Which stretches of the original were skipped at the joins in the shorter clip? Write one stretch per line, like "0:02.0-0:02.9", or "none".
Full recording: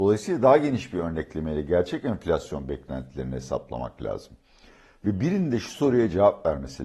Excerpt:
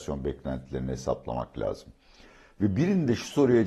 none